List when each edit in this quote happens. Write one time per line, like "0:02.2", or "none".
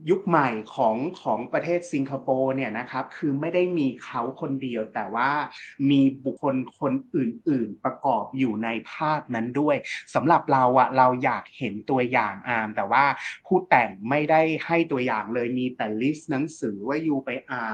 0:06.4